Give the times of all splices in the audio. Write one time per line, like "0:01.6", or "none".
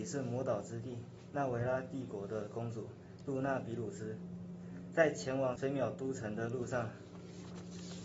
0:05.6